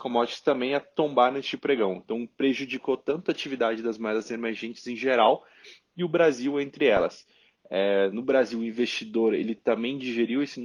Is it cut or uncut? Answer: uncut